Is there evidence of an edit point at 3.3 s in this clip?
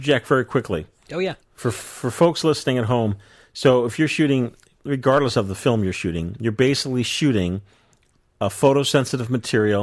no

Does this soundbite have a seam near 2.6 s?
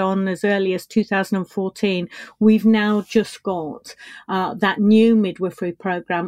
no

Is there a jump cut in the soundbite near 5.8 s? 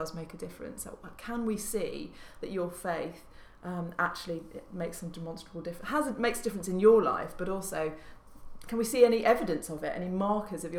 no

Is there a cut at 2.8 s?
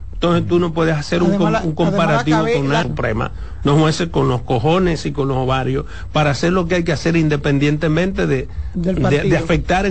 yes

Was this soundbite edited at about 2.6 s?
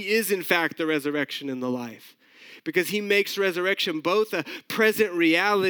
no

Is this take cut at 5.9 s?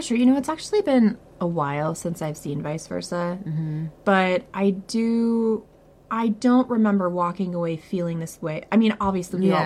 yes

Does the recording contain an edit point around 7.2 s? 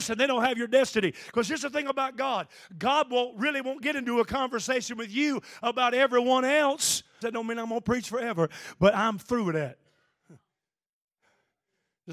yes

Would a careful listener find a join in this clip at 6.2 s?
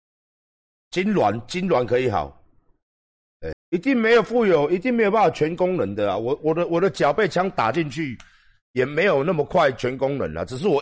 no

